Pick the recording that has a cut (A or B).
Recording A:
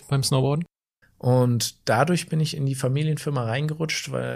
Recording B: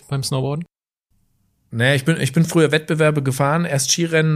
A